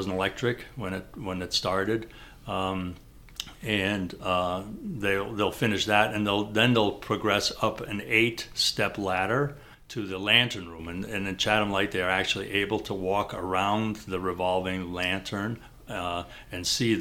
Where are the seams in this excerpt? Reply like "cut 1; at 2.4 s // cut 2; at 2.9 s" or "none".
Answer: none